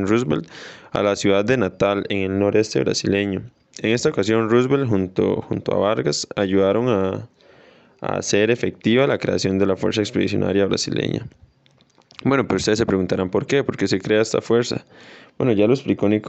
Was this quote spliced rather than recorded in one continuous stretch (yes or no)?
no